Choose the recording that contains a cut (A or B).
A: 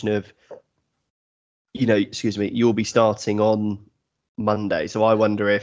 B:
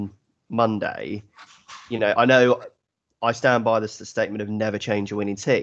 B